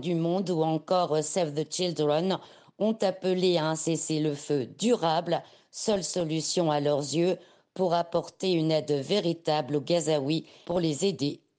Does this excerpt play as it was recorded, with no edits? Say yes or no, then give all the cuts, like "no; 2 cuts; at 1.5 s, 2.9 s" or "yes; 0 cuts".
yes; 0 cuts